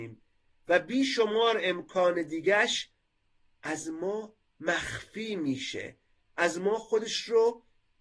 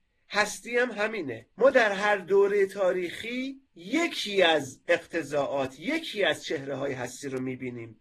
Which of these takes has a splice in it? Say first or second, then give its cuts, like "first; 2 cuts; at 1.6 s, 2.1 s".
second; 2 cuts; at 1.5 s, 3.7 s